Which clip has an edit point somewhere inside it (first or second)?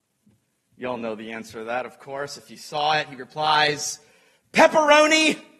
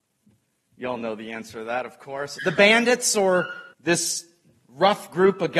second